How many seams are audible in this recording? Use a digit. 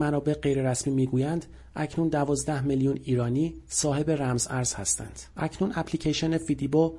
1